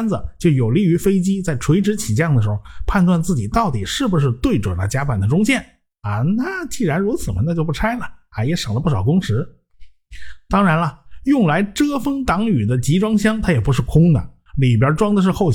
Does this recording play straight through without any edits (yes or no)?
yes